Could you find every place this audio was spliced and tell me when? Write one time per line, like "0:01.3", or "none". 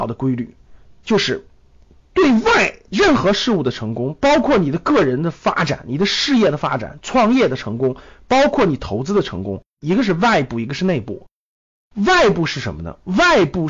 0:02.0